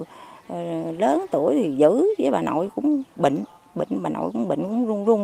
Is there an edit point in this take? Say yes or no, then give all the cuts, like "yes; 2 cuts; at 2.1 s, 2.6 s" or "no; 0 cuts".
no; 0 cuts